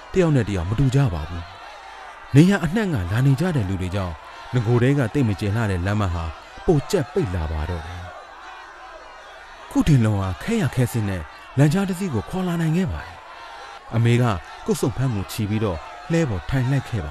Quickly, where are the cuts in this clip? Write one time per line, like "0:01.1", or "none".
none